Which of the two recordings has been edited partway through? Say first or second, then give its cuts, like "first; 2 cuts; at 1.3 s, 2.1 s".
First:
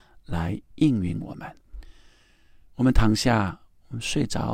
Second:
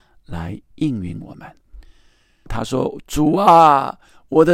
second; 1 cut; at 2.5 s